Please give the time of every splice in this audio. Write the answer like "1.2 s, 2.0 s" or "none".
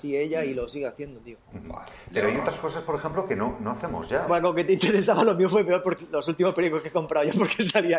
4.3 s, 6.0 s